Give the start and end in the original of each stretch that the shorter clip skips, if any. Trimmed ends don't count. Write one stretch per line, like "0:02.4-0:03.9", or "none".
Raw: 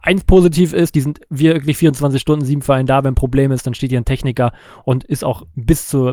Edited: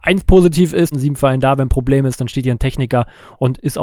0:00.9-0:02.4